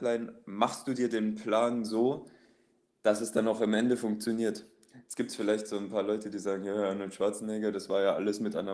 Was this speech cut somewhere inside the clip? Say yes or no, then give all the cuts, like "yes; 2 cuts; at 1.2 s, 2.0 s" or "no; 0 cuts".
no; 0 cuts